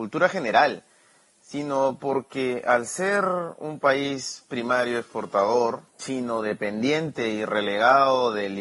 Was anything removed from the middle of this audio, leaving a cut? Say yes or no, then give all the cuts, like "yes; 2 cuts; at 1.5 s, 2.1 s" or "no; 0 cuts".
yes; 1 cut; at 5.9 s